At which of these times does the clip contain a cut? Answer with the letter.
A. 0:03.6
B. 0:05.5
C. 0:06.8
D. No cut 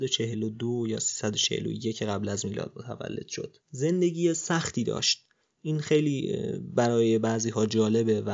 A